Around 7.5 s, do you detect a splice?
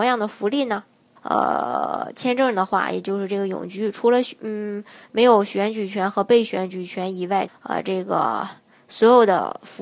yes; 2 cuts; at 1.2 s, 7.5 s

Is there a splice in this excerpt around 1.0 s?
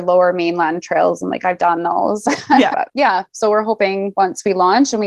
no; 1 cut; at 2.7 s

